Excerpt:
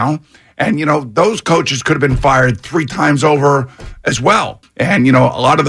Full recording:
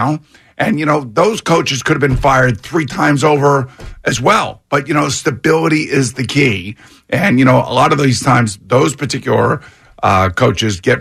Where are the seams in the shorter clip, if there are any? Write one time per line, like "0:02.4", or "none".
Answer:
0:04.6